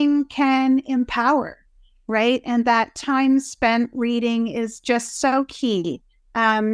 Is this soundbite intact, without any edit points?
yes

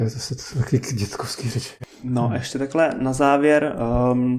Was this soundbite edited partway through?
no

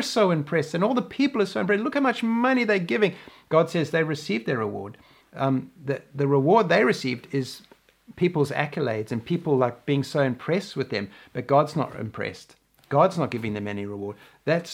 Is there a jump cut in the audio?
yes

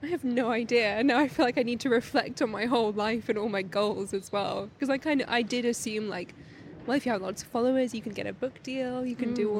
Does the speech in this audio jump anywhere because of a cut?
no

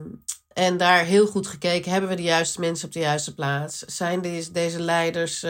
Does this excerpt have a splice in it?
no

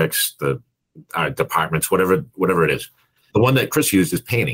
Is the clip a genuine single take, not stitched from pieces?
yes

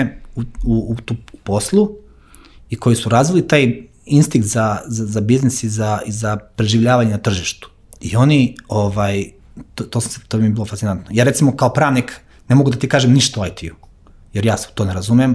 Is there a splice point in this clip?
no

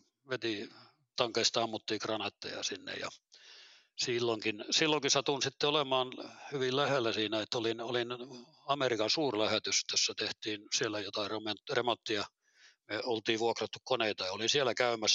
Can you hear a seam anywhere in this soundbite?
yes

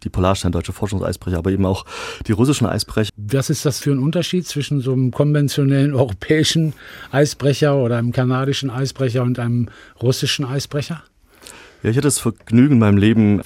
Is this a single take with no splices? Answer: no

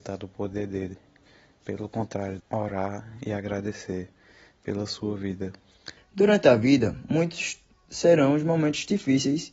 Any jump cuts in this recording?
yes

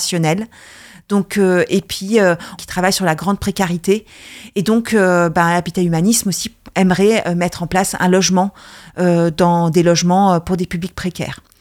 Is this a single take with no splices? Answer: no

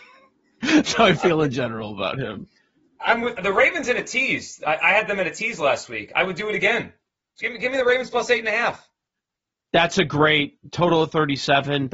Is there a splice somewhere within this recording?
yes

